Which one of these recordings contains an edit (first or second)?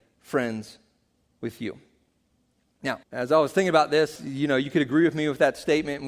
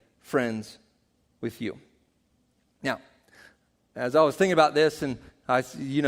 first